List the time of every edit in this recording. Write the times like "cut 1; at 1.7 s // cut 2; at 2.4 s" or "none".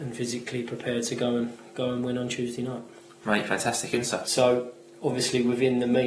cut 1; at 4.2 s